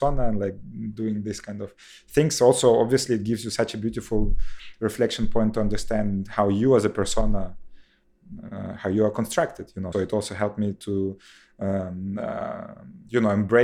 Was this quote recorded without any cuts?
no; 1 cut; at 9.9 s

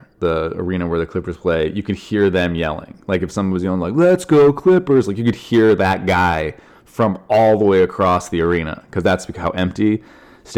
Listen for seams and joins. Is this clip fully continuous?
yes; 0 cuts

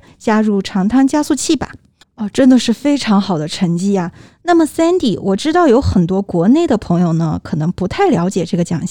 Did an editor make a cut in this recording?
yes; 1 cut; at 2.0 s

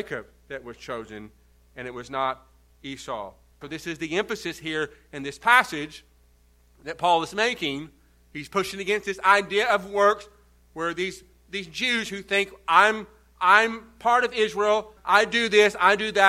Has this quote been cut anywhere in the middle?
yes; 2 cuts; at 3.6 s, 15.0 s

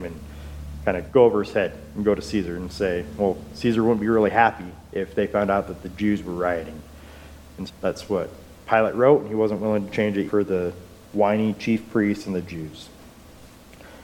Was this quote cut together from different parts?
yes; 2 cuts; at 7.7 s, 10.3 s

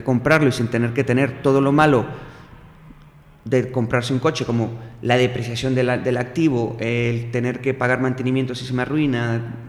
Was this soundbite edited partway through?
no; 0 cuts

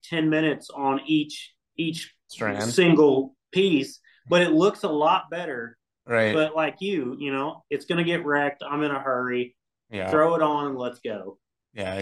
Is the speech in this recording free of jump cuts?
yes; 0 cuts

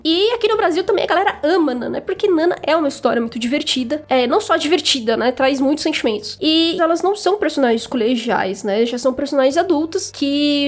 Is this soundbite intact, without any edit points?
no; 1 cut; at 6.8 s

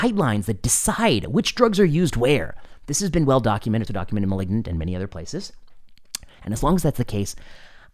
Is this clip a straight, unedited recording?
no; 1 cut; at 3.9 s

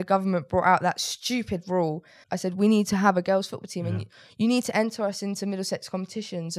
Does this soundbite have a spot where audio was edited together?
yes; 1 cut; at 2.2 s

